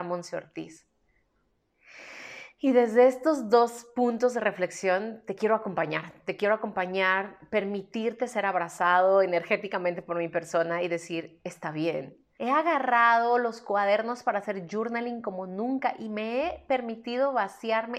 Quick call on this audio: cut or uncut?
cut